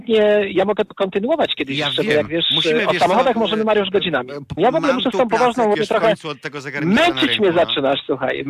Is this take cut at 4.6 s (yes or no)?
yes